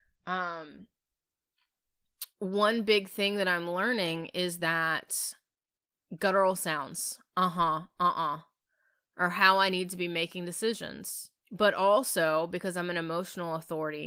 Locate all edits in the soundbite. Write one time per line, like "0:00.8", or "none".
0:02.3
0:11.4